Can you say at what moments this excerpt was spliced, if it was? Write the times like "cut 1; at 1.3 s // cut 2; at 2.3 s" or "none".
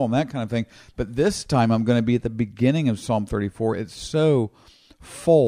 none